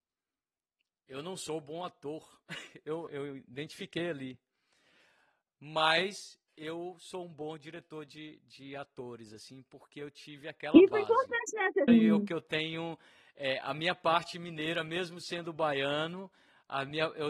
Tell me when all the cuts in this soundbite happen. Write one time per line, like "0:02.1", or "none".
0:03.1
0:11.9